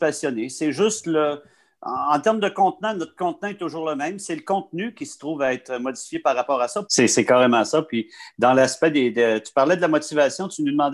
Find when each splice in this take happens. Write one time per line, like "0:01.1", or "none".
0:06.8